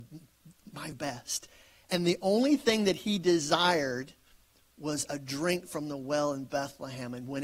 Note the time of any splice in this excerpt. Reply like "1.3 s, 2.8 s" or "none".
0.9 s